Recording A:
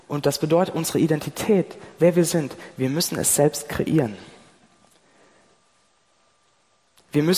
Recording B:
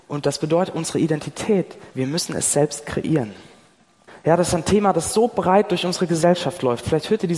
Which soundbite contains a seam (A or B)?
B